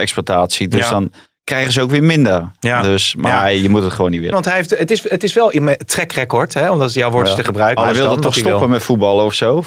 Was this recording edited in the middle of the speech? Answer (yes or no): yes